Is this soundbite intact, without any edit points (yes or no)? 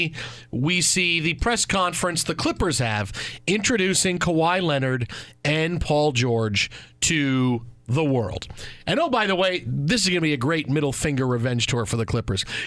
yes